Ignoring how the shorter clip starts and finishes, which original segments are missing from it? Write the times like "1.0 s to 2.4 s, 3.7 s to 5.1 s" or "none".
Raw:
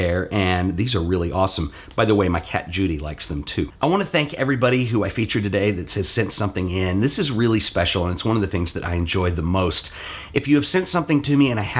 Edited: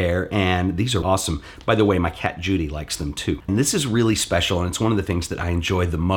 1.0 s to 1.3 s, 3.8 s to 6.9 s

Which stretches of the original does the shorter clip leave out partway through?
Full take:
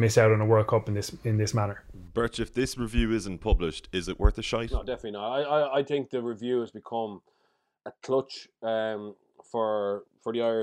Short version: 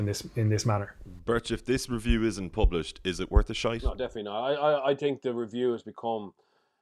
none

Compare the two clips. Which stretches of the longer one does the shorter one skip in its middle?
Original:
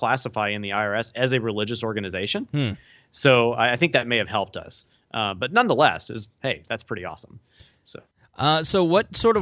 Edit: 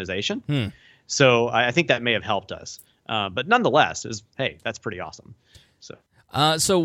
none

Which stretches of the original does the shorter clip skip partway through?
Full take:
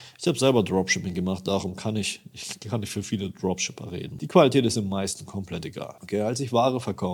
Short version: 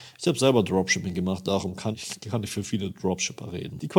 1.9 s to 2.3 s

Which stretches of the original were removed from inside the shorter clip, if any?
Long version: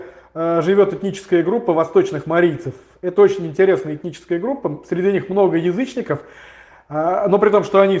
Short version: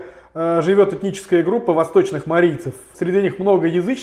2.9 s to 4.8 s

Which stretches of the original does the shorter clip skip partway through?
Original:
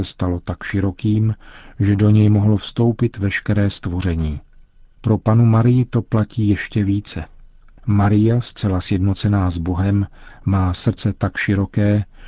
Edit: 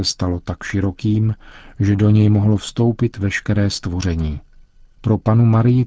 none

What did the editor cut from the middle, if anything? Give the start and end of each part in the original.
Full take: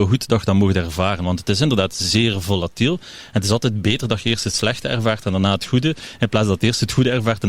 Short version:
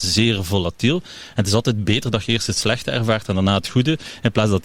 none

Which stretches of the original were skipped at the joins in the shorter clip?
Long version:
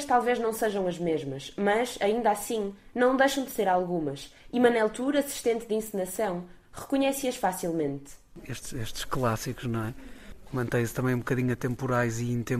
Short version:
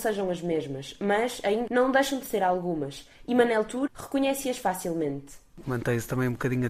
2.2 s to 2.9 s, 5.1 s to 6.7 s, 8.4 s to 10.5 s

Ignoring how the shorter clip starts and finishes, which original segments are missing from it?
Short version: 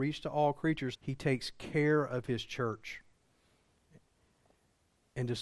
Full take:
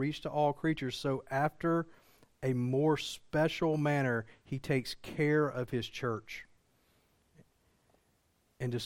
0.9 s to 4.4 s

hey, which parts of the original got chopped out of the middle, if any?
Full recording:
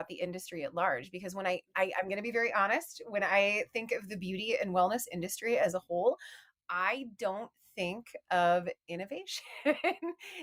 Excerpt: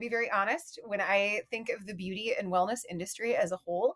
none

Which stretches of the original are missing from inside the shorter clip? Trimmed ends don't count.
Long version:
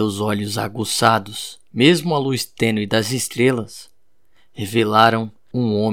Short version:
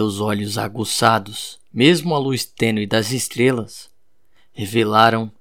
none

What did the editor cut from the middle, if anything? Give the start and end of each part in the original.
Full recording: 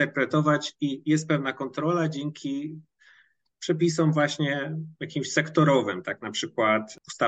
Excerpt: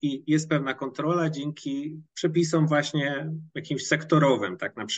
2.9 s to 3.5 s

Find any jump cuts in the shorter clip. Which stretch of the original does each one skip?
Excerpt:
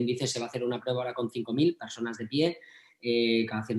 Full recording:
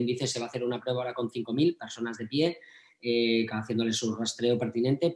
none

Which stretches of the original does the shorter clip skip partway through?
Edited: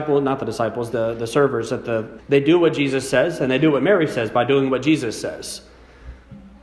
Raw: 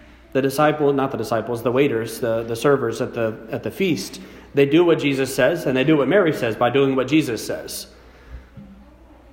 1.6 s to 2.2 s, 3.5 s to 4.4 s

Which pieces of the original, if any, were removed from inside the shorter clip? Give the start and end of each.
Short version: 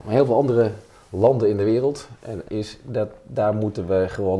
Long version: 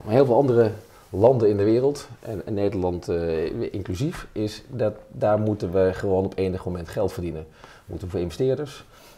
2.4 s to 4.3 s

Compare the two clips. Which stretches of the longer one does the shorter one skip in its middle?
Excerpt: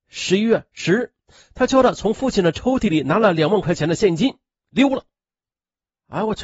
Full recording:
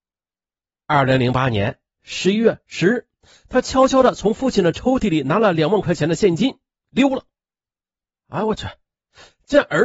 3.6 s to 3.9 s

